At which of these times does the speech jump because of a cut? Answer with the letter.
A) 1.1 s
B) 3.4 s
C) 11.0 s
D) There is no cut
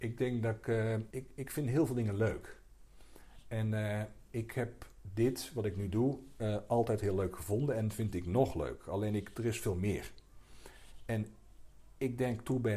A